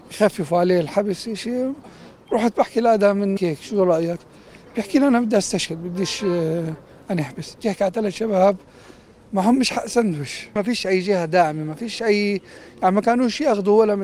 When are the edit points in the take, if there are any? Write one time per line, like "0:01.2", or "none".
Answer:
0:03.4